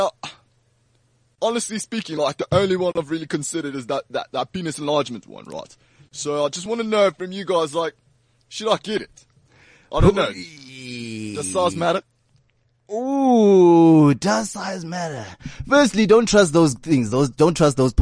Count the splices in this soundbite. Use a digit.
0